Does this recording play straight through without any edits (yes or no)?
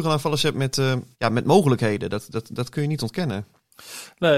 no